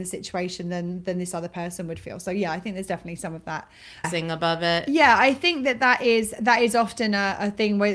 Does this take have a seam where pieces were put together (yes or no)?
yes